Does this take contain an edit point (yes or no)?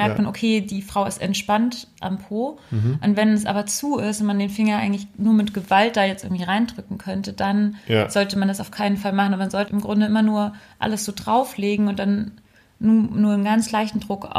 yes